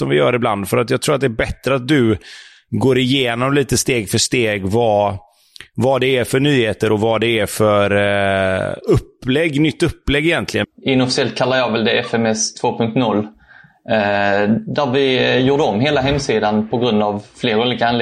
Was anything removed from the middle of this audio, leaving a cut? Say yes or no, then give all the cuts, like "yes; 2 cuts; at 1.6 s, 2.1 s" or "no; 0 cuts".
yes; 1 cut; at 10.6 s